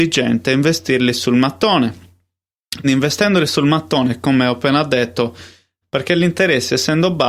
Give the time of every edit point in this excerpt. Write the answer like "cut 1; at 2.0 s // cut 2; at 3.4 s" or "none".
cut 1; at 2.8 s // cut 2; at 5.8 s